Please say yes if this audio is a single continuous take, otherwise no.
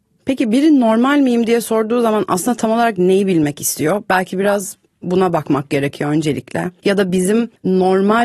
yes